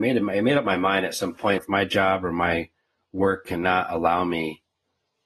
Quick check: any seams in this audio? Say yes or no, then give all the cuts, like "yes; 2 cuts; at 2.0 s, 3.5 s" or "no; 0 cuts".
yes; 1 cut; at 1.6 s